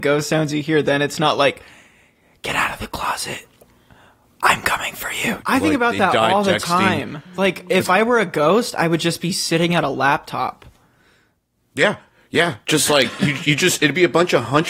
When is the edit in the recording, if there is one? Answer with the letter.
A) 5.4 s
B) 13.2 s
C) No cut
A